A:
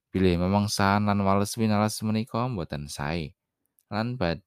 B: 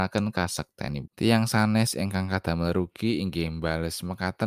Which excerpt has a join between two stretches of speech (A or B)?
B